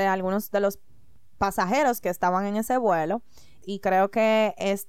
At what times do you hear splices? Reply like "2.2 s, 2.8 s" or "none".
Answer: 3.6 s